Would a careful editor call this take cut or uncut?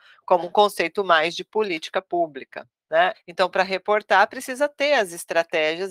cut